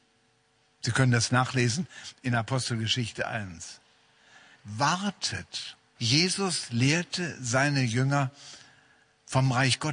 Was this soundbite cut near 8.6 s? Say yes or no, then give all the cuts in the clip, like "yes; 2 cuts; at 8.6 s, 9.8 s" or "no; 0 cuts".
no; 2 cuts; at 4.6 s, 6.0 s